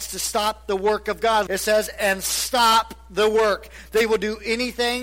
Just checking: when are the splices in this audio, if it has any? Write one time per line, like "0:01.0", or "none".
0:01.5